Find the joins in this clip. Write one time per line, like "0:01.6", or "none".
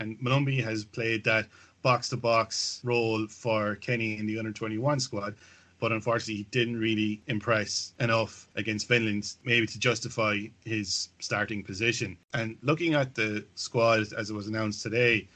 none